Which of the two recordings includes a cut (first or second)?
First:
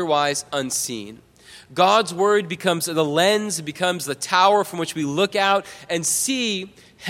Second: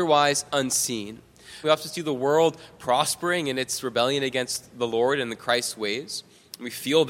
second